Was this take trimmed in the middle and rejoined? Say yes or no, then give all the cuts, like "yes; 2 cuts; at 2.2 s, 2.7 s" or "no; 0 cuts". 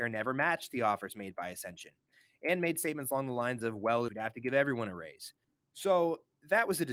yes; 1 cut; at 4.1 s